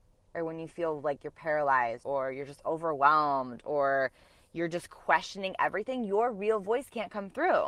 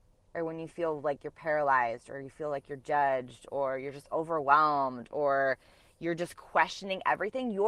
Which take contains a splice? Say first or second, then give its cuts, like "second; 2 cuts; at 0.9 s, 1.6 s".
first; 1 cut; at 2.0 s